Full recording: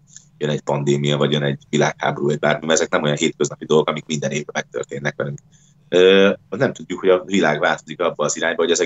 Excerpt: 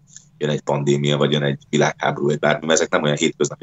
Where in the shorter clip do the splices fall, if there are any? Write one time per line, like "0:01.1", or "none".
none